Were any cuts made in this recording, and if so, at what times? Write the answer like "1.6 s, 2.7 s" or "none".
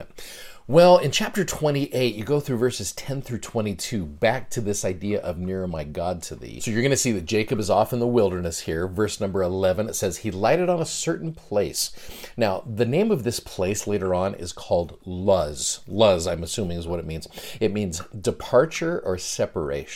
none